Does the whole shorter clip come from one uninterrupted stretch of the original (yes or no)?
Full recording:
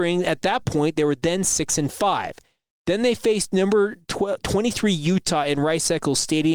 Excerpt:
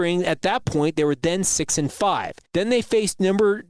no